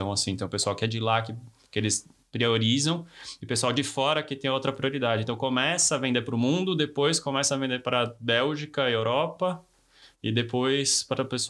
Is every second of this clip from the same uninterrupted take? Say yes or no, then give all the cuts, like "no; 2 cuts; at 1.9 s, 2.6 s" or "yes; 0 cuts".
yes; 0 cuts